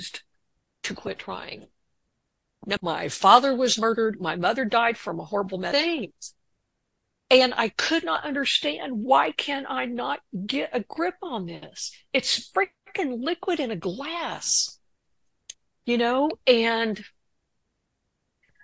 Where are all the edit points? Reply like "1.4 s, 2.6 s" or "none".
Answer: 2.8 s